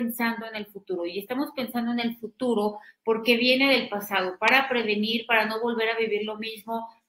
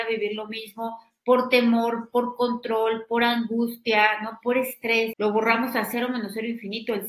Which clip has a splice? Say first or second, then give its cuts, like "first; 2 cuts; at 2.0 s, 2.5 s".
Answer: second; 1 cut; at 5.1 s